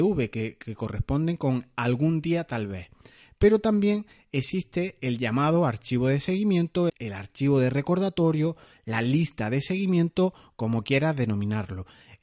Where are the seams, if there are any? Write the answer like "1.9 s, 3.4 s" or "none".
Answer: 6.9 s